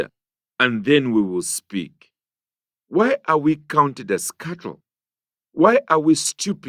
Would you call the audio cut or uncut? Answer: uncut